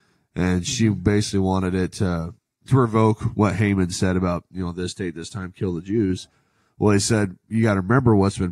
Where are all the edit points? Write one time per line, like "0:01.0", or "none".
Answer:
none